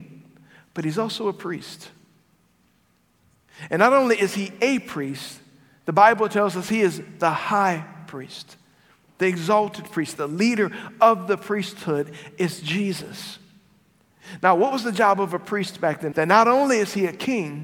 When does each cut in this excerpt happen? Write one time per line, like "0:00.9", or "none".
0:10.2
0:16.1